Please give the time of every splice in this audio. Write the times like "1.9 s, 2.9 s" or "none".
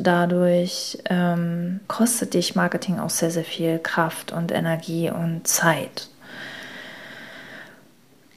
1.8 s